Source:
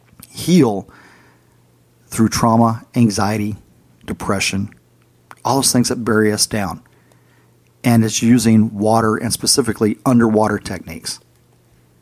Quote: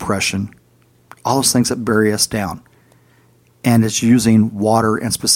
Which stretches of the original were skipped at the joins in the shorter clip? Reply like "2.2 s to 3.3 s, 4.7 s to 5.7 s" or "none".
none